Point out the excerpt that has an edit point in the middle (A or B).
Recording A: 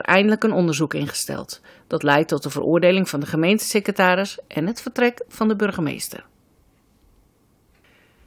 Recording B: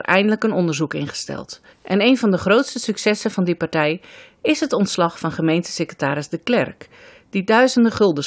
B